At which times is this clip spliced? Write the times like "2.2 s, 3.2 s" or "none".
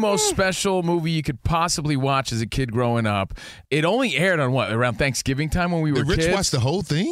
3.7 s